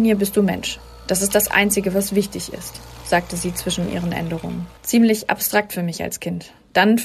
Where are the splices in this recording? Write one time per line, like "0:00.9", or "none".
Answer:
0:04.8